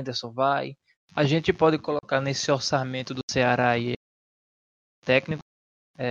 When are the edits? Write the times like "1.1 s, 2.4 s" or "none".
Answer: 0.9 s